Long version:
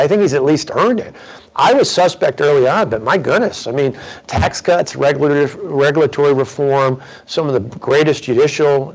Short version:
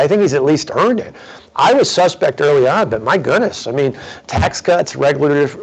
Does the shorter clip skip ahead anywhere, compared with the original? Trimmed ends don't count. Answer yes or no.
no